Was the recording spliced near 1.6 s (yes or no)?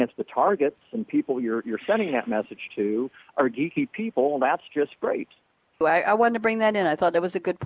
no